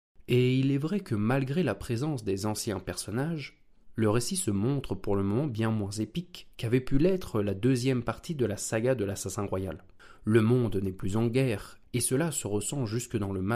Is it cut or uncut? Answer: uncut